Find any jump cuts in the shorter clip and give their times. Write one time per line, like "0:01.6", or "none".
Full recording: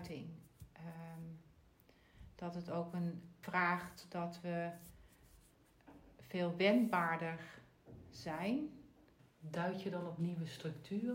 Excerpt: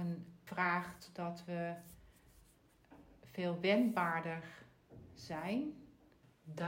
none